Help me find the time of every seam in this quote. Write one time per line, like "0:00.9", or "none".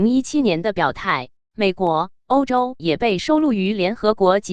0:01.4
0:02.8